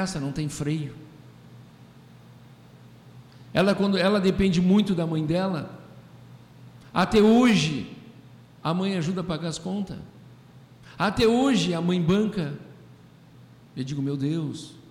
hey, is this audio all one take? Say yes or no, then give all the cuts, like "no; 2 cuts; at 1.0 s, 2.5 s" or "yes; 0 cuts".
yes; 0 cuts